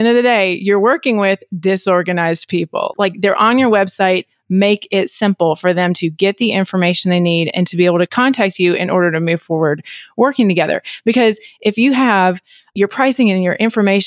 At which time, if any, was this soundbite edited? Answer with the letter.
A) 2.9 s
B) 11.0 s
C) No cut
A